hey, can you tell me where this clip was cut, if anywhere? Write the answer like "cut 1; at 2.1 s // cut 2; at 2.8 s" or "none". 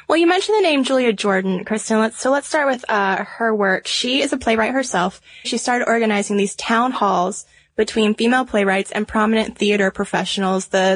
cut 1; at 5.4 s